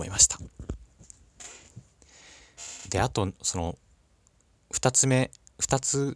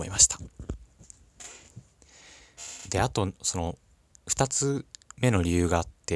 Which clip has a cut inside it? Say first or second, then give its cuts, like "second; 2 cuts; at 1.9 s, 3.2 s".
second; 1 cut; at 4.1 s